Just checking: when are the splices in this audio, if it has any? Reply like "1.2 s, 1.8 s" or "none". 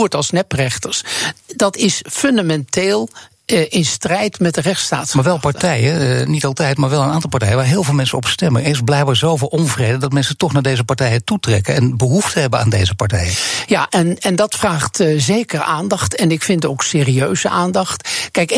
1.4 s

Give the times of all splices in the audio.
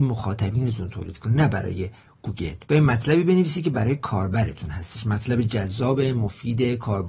2.6 s

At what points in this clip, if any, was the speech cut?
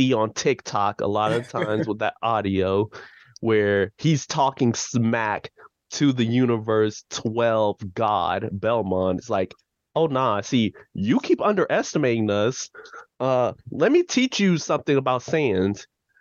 none

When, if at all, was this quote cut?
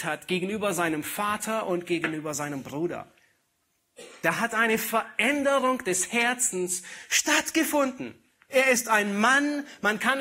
8.5 s

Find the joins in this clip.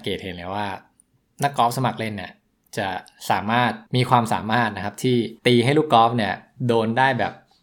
3.9 s, 5.4 s

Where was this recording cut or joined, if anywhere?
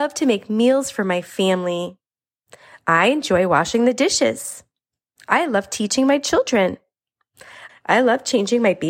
7.7 s

